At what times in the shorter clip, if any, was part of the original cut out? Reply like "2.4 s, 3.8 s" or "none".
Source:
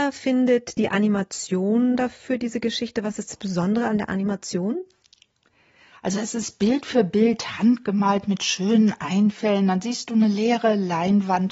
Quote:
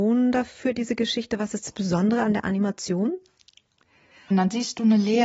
4.3 s